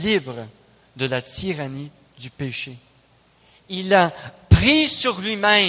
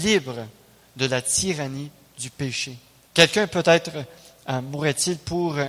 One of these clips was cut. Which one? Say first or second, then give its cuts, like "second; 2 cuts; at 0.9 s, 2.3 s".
second; 1 cut; at 3.1 s